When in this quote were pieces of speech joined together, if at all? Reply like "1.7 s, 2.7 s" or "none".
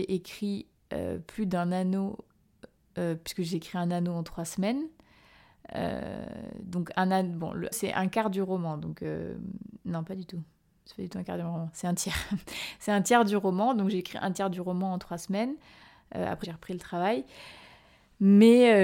7.7 s, 16.4 s